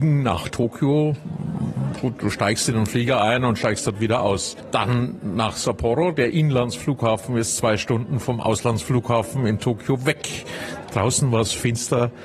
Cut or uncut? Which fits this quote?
cut